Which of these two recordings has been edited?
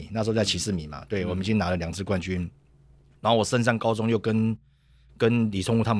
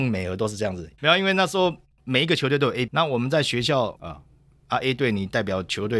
second; 3 cuts; at 1.0 s, 2.9 s, 4.0 s

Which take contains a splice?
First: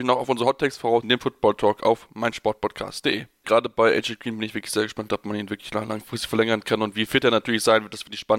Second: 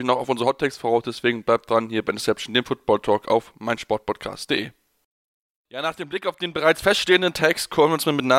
first; 3 cuts; at 1.0 s, 3.4 s, 5.1 s

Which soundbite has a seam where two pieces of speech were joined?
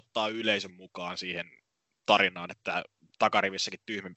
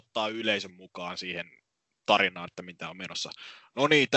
second; 1 cut; at 2.5 s

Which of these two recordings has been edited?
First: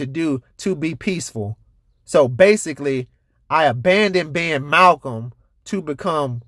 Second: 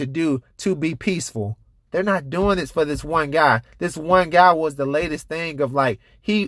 second; 1 cut; at 1.9 s

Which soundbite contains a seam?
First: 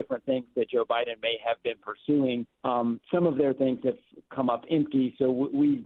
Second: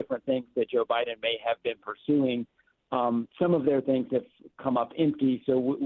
first; 1 cut; at 2.5 s

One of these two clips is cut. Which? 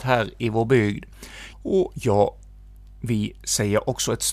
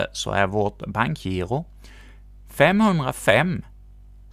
first; 1 cut; at 1.5 s

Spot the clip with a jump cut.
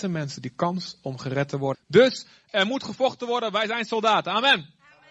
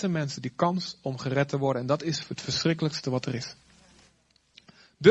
first; 1 cut; at 1.7 s

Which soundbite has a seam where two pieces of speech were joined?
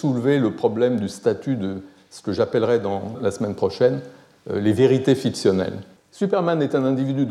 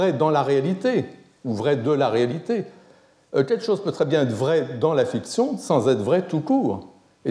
first; 2 cuts; at 3.1 s, 6.0 s

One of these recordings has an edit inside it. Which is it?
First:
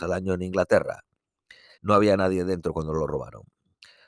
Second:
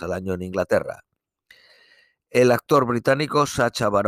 first; 1 cut; at 1.7 s

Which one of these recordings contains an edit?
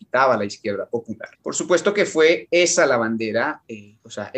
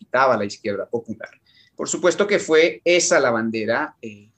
first; 1 cut; at 1.3 s

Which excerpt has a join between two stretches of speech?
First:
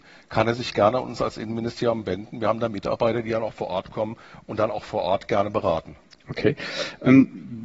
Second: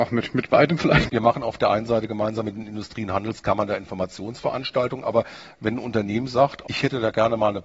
second; 2 cuts; at 1.1 s, 6.6 s

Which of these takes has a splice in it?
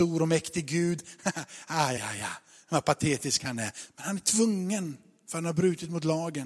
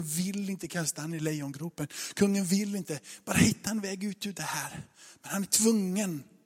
first; 2 cuts; at 2.0 s, 3.9 s

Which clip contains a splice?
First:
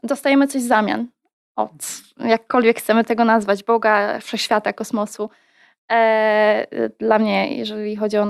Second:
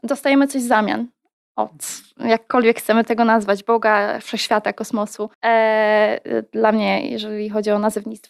second; 1 cut; at 5.3 s

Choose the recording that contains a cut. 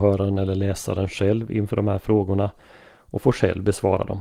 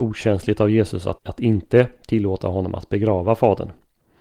second; 1 cut; at 1.2 s

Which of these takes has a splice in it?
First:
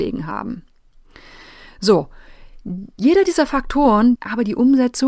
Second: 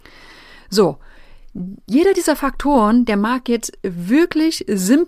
first; 1 cut; at 4.2 s

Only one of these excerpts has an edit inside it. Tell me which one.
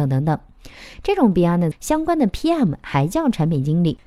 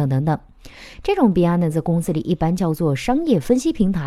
first; 1 cut; at 1.7 s

